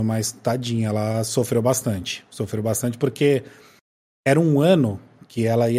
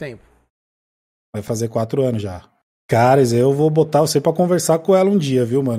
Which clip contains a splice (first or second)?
second